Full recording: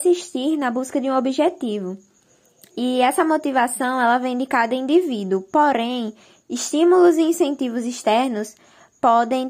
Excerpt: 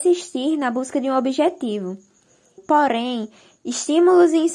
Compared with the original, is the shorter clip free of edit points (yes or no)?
no